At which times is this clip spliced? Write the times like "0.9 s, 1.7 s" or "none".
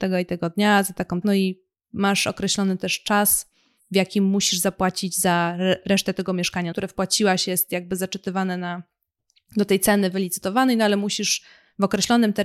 1.2 s, 6.7 s